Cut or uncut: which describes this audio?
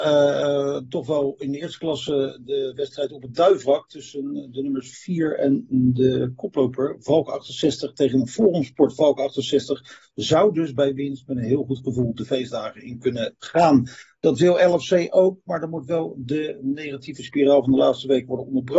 uncut